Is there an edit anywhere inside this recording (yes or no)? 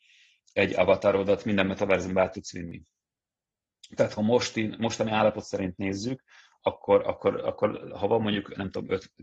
no